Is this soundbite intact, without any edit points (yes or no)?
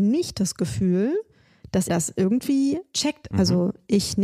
no